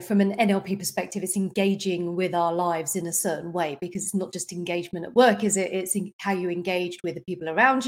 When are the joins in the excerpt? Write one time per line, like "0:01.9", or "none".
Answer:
none